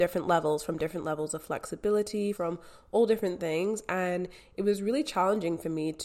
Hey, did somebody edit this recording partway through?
yes; 1 cut; at 2.3 s

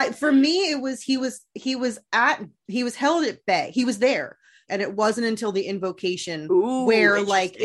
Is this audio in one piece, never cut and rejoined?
no; 1 cut; at 4.7 s

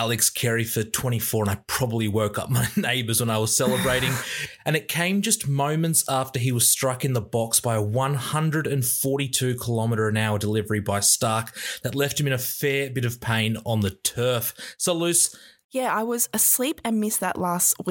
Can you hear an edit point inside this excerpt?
yes; 1 cut; at 15.6 s

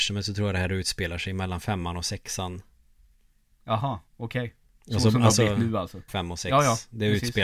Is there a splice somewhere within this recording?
yes; 2 cuts; at 4.1 s, 6.1 s

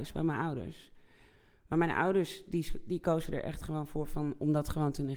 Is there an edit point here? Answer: no; 0 cuts

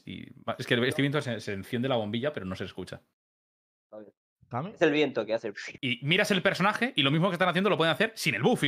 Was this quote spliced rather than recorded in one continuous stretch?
yes; 1 cut; at 5.8 s

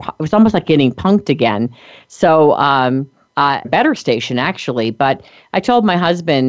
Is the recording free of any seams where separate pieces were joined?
no; 1 cut; at 3.6 s

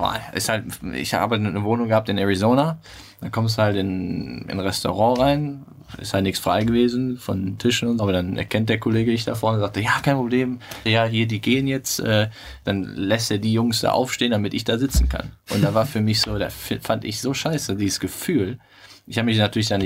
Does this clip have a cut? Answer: yes; 2 cuts; at 8.0 s, 10.9 s

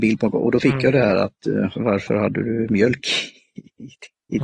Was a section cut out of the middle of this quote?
yes; 1 cut; at 1.8 s

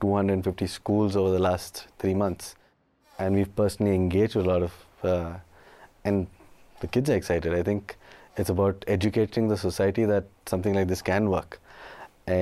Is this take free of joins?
yes; 0 cuts

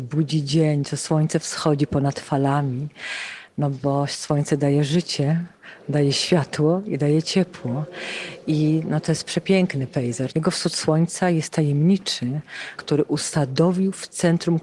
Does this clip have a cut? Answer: yes; 2 cuts; at 10.3 s, 12.8 s

